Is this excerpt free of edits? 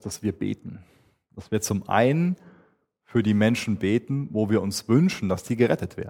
yes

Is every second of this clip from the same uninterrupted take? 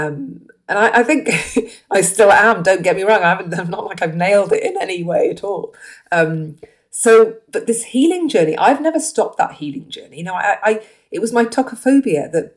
yes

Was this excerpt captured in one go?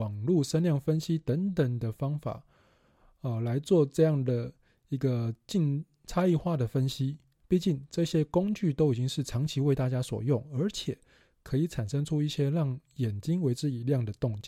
no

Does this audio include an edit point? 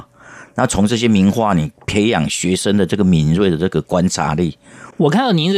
no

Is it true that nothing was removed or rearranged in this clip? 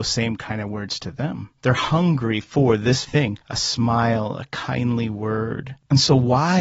no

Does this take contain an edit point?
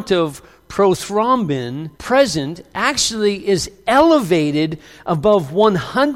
yes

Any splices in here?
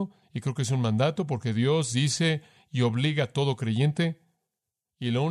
no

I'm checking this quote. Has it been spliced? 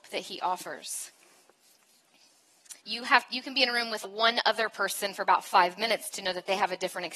yes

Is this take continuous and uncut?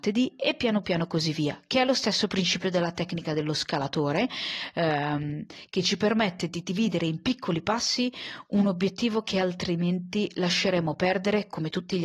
yes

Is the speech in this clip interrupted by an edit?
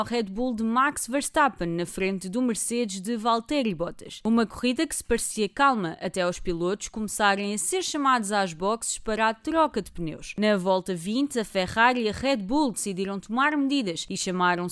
no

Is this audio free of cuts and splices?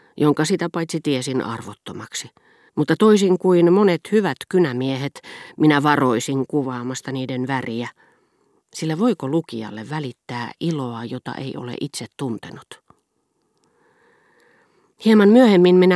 no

